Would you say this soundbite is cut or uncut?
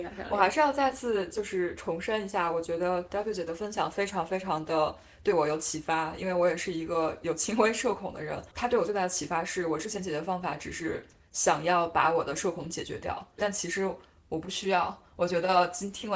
cut